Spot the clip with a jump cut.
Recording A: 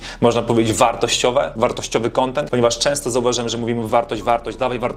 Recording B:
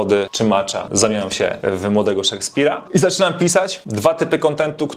A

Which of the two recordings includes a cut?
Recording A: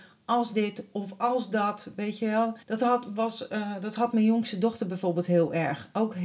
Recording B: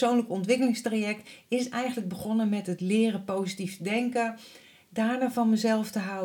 A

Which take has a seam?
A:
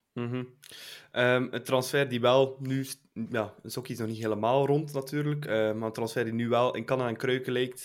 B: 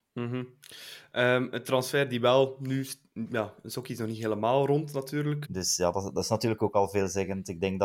B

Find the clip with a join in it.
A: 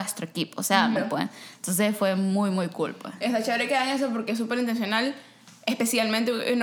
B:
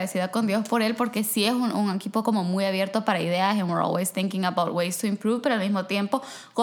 A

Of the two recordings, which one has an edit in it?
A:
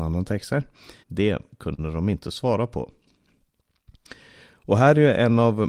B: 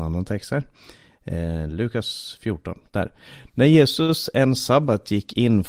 A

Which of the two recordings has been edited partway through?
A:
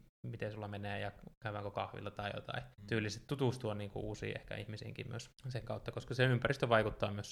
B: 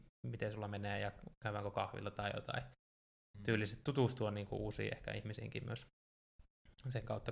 A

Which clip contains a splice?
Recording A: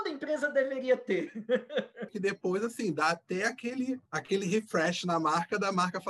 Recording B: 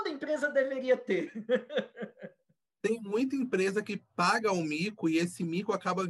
A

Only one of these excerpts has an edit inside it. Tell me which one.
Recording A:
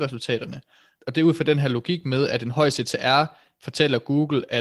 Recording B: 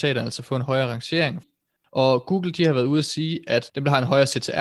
B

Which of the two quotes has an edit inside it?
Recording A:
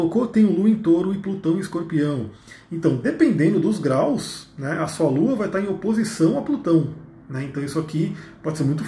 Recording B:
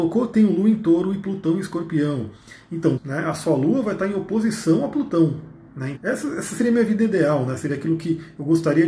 B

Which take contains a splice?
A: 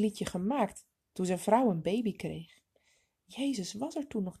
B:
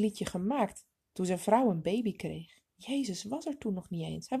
B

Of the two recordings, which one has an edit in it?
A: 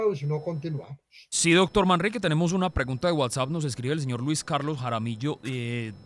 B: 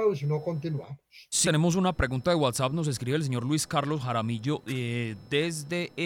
B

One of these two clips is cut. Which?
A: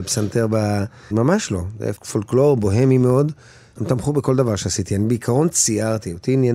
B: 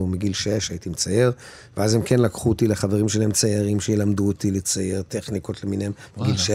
A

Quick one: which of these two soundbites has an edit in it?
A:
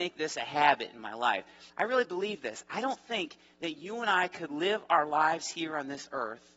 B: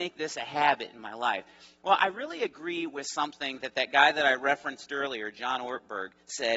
A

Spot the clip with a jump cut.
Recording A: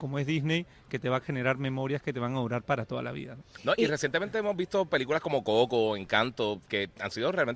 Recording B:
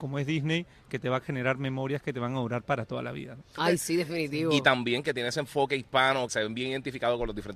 B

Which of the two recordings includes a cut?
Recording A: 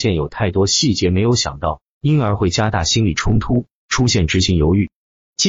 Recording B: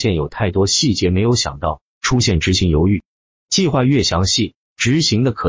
B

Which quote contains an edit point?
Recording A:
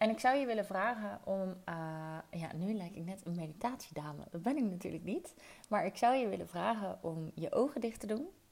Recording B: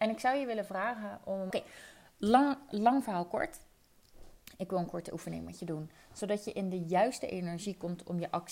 B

